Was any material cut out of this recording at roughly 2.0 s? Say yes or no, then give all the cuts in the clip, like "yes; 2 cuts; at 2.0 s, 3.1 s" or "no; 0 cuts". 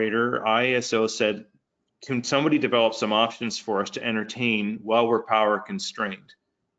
no; 0 cuts